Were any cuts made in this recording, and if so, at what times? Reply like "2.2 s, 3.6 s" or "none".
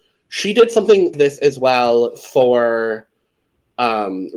1.1 s